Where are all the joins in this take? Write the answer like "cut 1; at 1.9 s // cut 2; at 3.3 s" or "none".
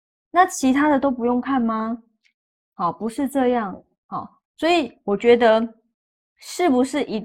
none